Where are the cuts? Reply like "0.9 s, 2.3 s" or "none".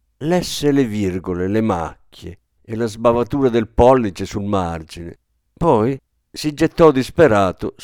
none